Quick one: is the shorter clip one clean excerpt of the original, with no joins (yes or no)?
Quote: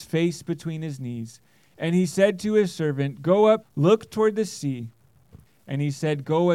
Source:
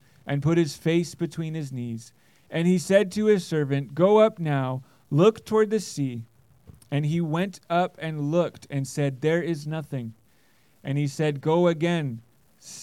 no